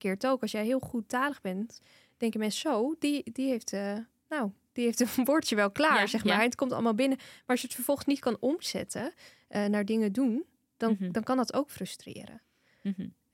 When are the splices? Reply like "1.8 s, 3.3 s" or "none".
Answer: none

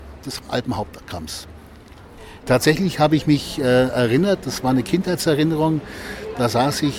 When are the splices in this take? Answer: 2.4 s

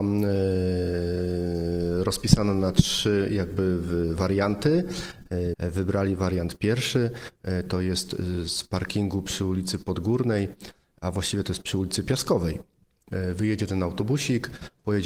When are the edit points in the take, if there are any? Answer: 5.5 s

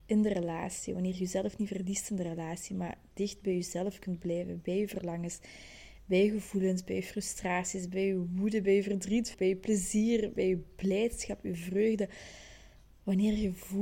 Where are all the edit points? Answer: 9.3 s, 10.4 s

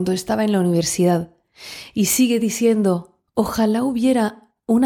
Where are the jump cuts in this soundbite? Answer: 1.9 s, 3.3 s

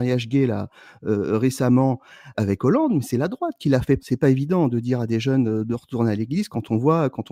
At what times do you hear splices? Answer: 2.3 s, 4.0 s

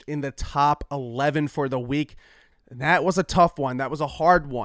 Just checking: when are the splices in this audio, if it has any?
2.5 s

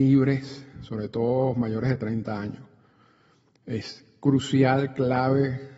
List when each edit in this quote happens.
none

